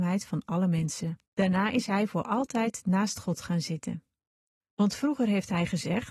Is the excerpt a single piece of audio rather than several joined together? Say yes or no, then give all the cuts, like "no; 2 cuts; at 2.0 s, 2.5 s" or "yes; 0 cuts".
no; 2 cuts; at 1.3 s, 4.6 s